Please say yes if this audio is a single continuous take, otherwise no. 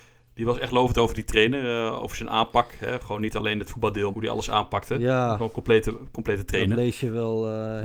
no